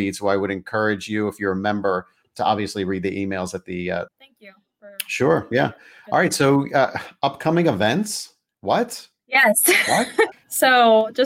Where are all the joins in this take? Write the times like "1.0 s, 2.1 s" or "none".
4.1 s, 10.3 s